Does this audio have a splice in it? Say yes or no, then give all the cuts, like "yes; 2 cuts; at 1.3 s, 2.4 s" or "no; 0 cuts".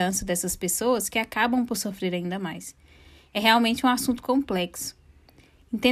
no; 0 cuts